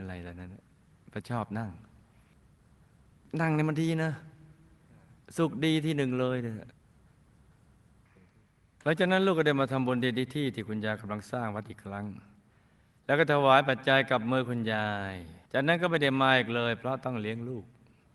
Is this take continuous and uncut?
no; 1 cut; at 15.5 s

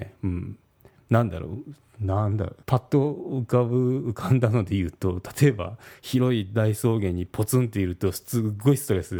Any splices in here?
yes; 1 cut; at 2.6 s

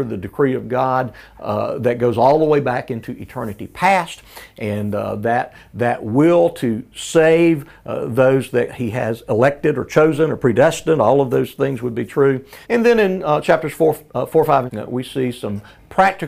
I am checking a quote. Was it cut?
yes; 2 cuts; at 12.6 s, 14.7 s

